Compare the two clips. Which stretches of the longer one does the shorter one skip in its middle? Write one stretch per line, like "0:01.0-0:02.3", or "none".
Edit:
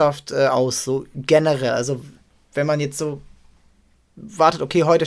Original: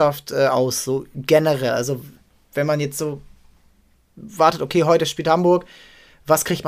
none